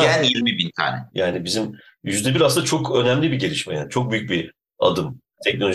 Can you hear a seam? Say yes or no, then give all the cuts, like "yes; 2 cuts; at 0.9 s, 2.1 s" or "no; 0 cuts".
yes; 1 cut; at 1.1 s